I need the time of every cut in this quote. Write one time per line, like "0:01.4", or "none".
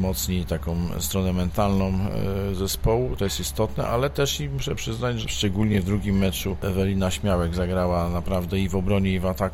0:03.2
0:05.2